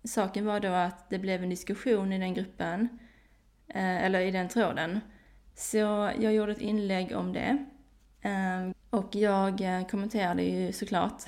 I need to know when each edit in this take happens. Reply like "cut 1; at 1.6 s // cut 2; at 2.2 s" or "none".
cut 1; at 5.4 s // cut 2; at 8.7 s